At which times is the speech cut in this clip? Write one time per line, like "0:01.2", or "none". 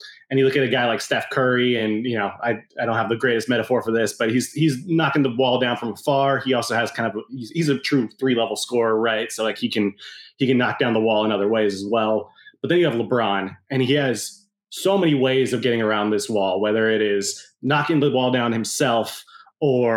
none

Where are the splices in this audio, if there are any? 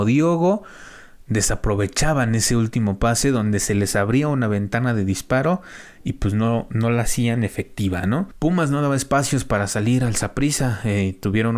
none

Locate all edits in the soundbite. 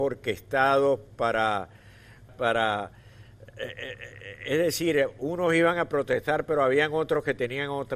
0:02.3

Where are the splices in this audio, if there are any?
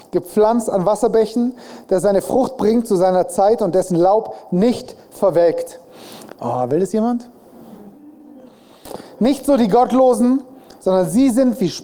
0:06.4

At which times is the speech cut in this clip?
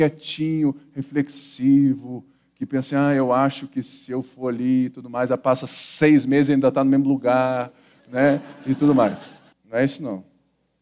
0:09.5

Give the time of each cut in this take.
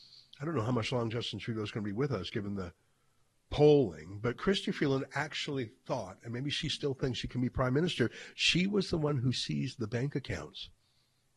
none

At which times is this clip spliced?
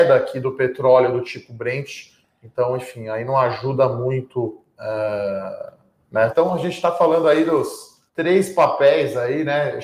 0:06.3
0:08.1

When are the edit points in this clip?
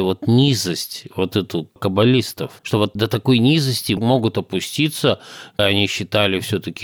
0:02.6

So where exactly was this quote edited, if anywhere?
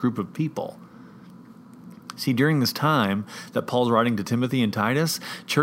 none

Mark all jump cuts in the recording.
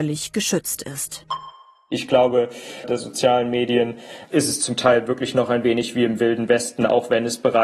0:02.8

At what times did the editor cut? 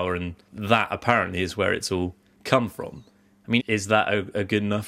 0:03.6

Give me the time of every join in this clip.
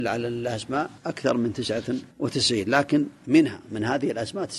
0:01.0
0:02.1

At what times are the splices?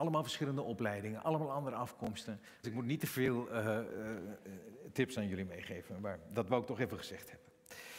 0:02.6
0:03.9

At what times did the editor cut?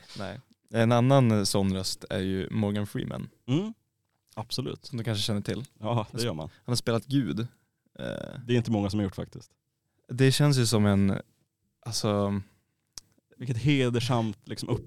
none

